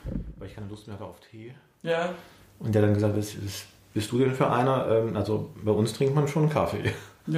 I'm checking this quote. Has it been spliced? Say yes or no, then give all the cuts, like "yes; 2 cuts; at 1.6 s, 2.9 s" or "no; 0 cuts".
no; 0 cuts